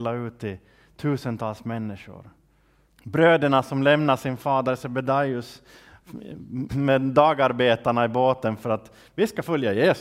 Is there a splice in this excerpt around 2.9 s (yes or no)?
yes